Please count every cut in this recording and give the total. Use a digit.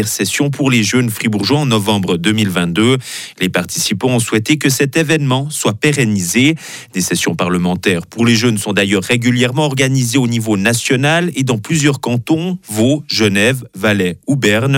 0